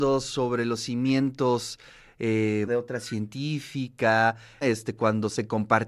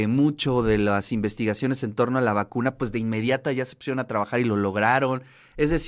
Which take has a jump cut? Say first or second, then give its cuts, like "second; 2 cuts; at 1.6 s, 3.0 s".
first; 2 cuts; at 2.7 s, 4.6 s